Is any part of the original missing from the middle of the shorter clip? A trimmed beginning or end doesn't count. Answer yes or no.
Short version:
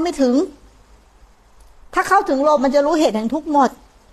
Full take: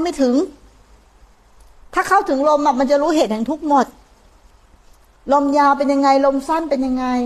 yes